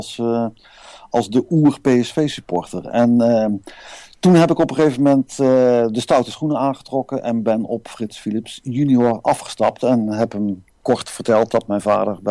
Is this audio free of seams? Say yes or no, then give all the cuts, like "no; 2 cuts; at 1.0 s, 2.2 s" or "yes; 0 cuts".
yes; 0 cuts